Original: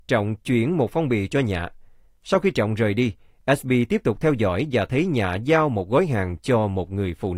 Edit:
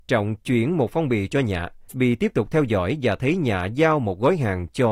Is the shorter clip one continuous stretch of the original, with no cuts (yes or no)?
no